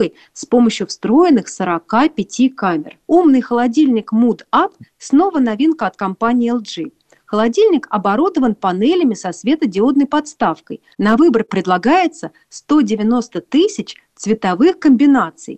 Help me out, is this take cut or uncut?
cut